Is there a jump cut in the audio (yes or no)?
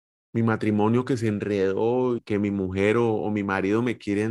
yes